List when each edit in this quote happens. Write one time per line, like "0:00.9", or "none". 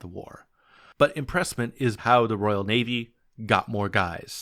0:02.0